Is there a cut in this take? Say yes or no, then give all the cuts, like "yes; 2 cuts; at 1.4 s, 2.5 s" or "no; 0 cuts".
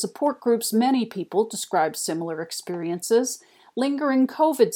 no; 0 cuts